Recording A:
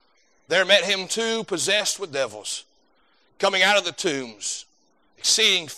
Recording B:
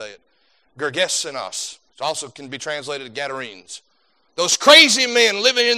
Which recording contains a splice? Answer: B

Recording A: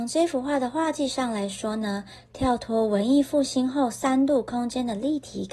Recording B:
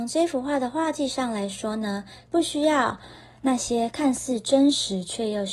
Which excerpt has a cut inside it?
B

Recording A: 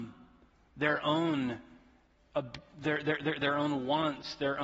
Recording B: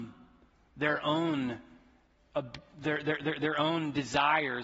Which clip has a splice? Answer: A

